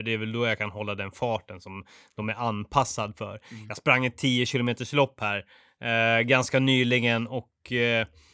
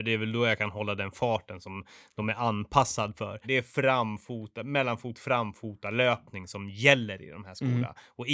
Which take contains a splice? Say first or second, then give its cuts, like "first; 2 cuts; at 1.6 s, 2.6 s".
second; 1 cut; at 3.4 s